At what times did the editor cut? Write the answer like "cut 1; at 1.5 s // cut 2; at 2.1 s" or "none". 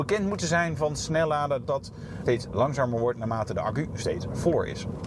cut 1; at 1.6 s